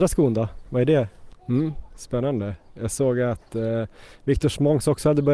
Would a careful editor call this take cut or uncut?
cut